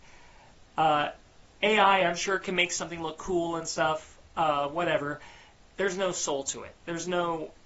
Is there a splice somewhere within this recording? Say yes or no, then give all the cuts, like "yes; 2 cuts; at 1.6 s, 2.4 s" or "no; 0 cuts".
no; 0 cuts